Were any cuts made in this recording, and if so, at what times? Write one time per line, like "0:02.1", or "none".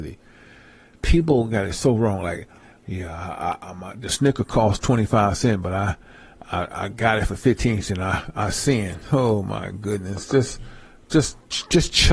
none